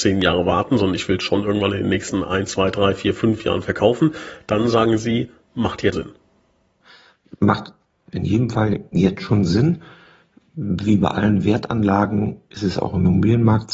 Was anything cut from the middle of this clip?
yes; 1 cut; at 5.9 s

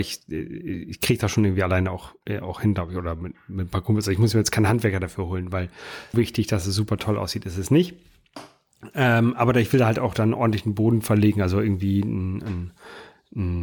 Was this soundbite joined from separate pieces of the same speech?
yes; 1 cut; at 6.1 s

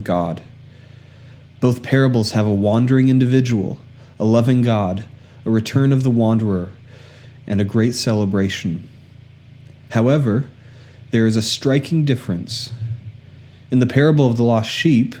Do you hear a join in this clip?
no; 0 cuts

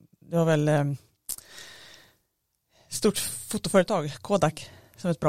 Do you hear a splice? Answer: no; 0 cuts

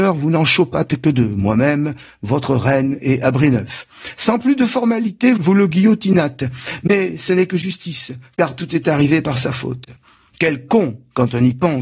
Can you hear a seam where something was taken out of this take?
no; 0 cuts

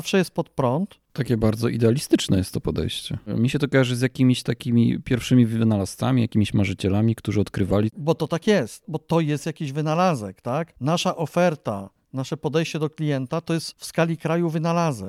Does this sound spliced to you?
no; 0 cuts

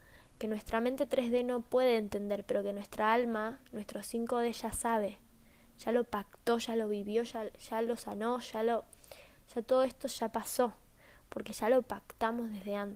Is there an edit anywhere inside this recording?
no; 0 cuts

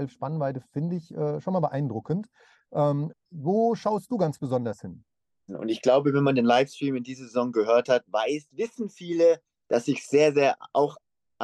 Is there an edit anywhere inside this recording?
yes; 3 cuts; at 3.1 s, 5.5 s, 9.6 s

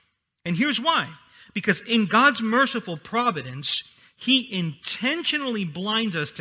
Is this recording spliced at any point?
no; 0 cuts

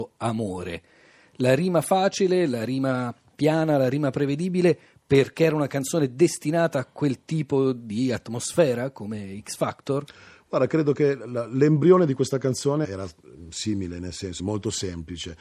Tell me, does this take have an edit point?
yes; 2 cuts; at 12.8 s, 14.4 s

